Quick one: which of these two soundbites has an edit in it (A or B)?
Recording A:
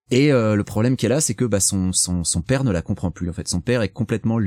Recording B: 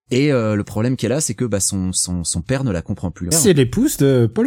B